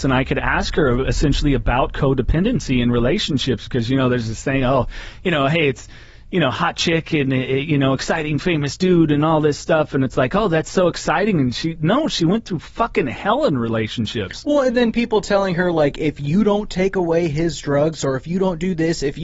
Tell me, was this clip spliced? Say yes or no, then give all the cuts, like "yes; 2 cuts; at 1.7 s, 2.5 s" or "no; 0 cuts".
no; 0 cuts